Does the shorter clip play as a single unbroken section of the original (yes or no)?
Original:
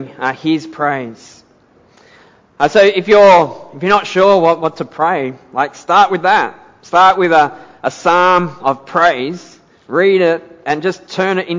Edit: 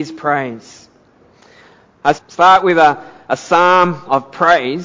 no